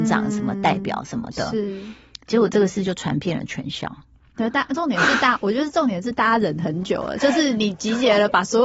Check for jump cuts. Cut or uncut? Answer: cut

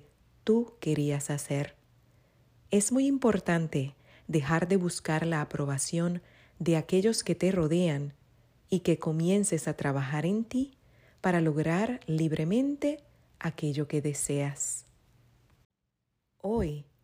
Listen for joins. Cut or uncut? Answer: uncut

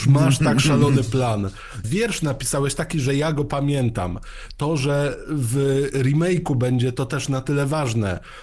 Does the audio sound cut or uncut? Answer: cut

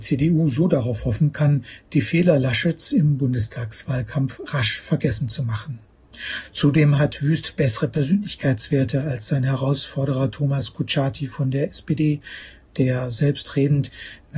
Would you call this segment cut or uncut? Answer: uncut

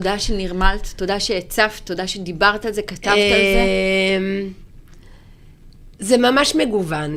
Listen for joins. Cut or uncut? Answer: uncut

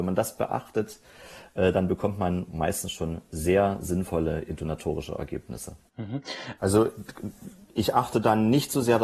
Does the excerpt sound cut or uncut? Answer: cut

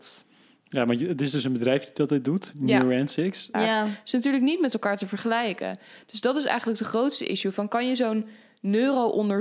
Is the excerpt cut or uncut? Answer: cut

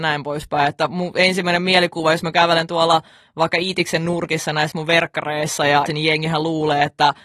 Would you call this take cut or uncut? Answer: cut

